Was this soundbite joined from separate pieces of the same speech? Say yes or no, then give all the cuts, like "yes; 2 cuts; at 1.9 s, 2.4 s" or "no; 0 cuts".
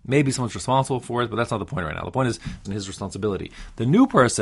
yes; 1 cut; at 2.6 s